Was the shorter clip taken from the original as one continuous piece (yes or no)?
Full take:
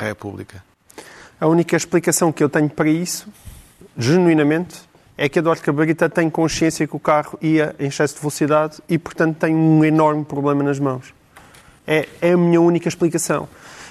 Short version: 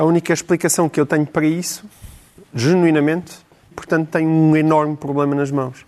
no